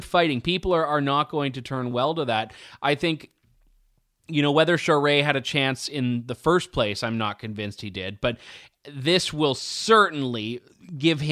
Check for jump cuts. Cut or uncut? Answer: uncut